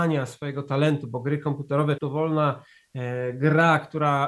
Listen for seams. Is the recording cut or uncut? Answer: cut